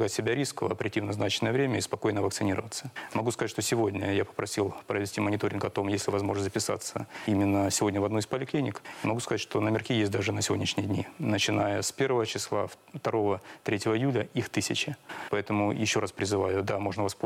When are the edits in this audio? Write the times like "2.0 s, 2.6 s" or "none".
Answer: none